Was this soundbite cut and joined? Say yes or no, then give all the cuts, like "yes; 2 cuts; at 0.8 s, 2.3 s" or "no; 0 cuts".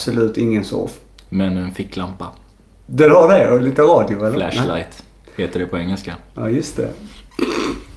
no; 0 cuts